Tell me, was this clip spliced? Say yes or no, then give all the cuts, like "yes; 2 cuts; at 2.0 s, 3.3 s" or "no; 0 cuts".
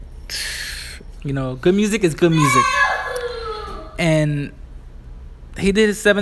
yes; 1 cut; at 1.2 s